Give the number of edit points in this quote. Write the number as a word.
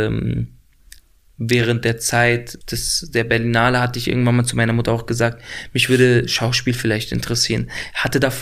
one